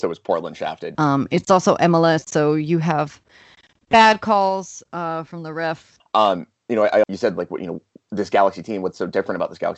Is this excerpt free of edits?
no; 3 cuts; at 0.9 s, 6.0 s, 7.0 s

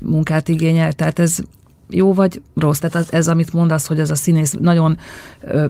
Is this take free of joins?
no; 1 cut; at 2.8 s

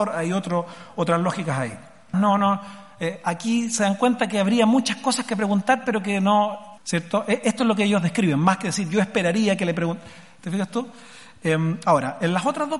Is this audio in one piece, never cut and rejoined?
no; 2 cuts; at 2.1 s, 6.8 s

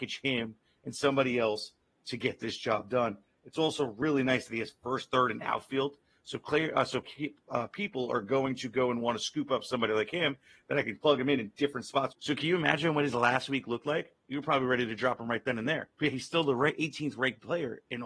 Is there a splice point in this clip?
yes; 2 cuts; at 12.1 s, 15.9 s

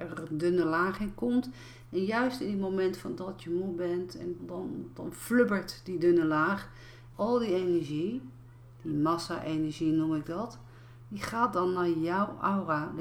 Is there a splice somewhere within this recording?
yes; 2 cuts; at 4.4 s, 7.1 s

